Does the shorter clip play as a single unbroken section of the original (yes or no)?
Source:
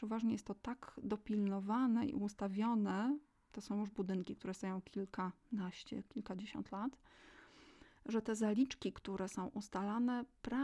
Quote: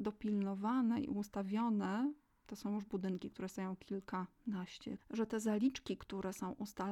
no